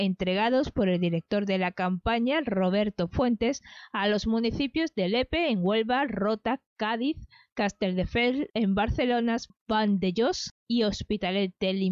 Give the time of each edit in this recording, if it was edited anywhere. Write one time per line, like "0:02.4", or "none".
none